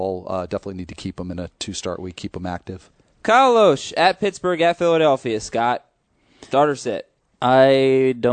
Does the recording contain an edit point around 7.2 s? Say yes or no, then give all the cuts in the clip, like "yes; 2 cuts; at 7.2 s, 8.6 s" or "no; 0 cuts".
no; 0 cuts